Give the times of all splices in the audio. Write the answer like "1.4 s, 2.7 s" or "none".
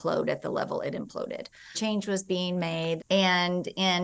1.7 s, 3.0 s